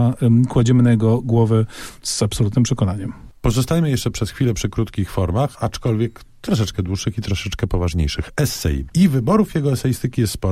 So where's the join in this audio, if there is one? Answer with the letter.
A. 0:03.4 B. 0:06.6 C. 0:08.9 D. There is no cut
C